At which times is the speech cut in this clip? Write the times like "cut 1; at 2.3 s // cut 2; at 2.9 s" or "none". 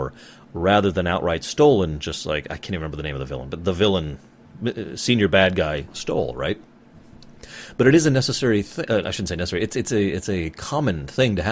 none